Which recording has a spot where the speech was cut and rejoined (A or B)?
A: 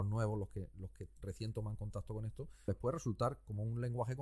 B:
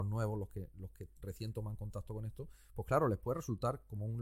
A